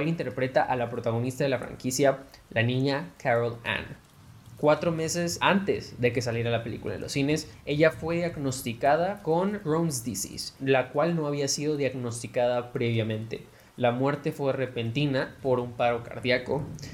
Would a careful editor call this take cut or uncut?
uncut